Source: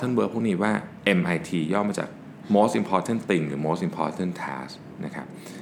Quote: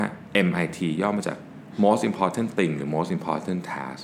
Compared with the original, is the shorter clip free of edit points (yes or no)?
yes